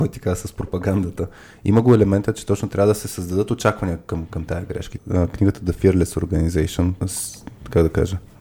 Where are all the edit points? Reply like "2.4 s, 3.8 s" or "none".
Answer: 5.0 s, 7.0 s